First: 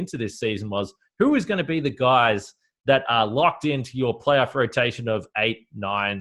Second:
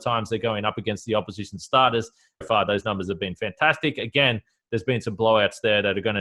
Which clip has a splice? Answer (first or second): second